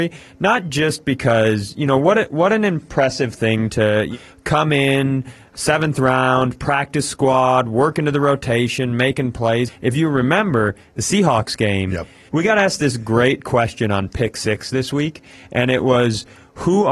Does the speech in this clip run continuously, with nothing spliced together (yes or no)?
no